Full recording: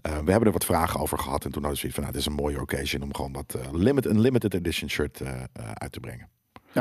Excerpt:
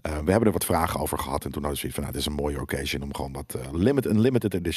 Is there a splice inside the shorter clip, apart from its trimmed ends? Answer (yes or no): no